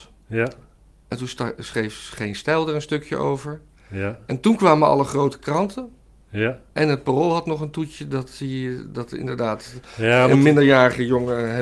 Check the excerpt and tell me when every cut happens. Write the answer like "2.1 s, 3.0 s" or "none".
none